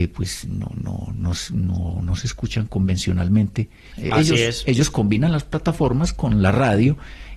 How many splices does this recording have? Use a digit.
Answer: 1